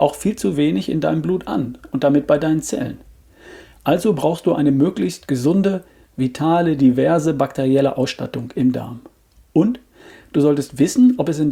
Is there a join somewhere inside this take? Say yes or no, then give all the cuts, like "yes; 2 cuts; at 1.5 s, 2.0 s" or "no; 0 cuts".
no; 0 cuts